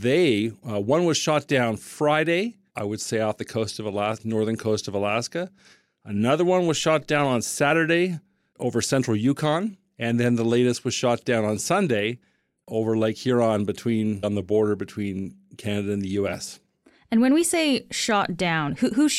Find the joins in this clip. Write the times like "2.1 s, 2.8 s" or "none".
2.7 s, 14.2 s